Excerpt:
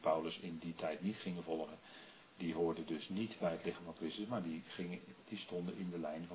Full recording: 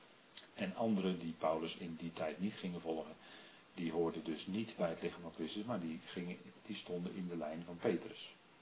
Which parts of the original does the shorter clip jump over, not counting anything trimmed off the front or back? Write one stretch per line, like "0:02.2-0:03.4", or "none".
none